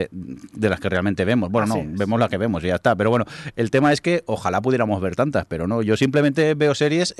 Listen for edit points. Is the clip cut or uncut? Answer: uncut